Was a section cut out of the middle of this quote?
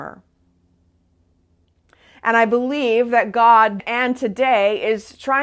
yes; 1 cut; at 3.8 s

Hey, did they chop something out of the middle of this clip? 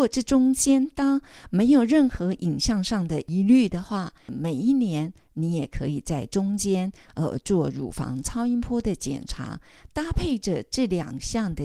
yes; 1 cut; at 4.3 s

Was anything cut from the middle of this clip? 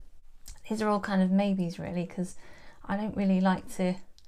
no; 0 cuts

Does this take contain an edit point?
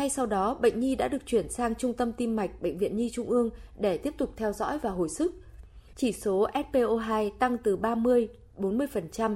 yes; 1 cut; at 5.9 s

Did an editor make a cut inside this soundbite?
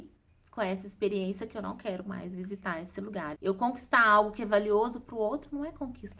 yes; 1 cut; at 3.3 s

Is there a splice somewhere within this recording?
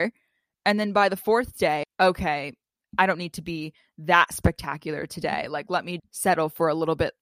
yes; 2 cuts; at 1.8 s, 6.0 s

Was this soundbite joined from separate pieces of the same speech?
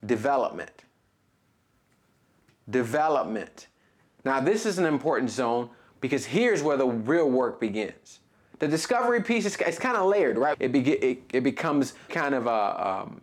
yes; 2 cuts; at 10.5 s, 12.1 s

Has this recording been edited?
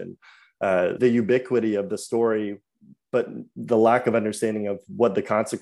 yes; 1 cut; at 1.0 s

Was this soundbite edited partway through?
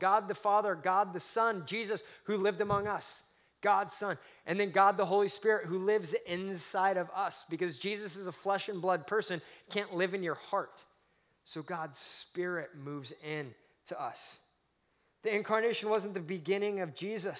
no; 0 cuts

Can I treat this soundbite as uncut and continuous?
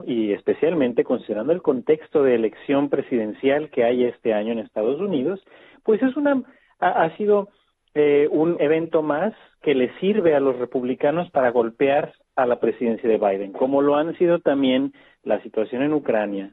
no; 1 cut; at 8.6 s

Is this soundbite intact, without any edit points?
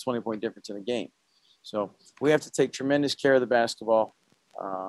yes; 0 cuts

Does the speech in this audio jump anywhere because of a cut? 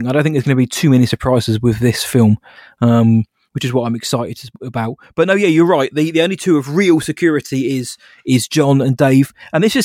no; 0 cuts

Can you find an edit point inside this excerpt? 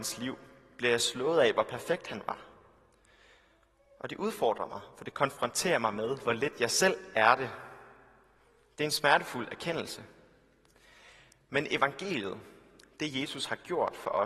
no; 0 cuts

